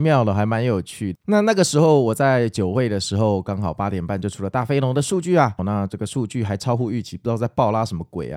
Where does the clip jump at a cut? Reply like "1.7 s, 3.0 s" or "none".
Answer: 1.2 s, 5.6 s